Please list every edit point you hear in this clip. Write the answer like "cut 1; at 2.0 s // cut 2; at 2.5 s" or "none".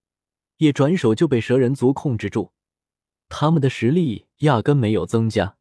none